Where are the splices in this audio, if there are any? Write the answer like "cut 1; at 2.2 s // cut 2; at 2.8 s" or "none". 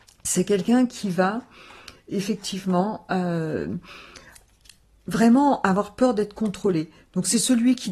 none